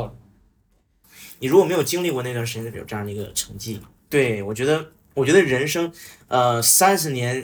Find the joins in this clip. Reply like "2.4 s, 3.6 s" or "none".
1.0 s, 2.7 s, 4.0 s